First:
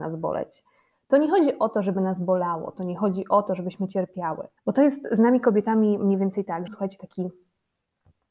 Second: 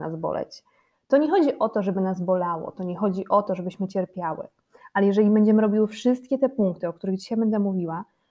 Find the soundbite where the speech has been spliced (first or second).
first